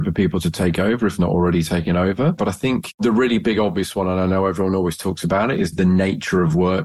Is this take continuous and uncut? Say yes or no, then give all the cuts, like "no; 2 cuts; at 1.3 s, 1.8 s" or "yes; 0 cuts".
no; 1 cut; at 2.4 s